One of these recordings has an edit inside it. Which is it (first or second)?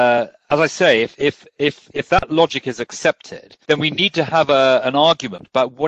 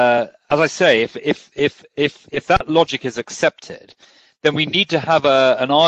first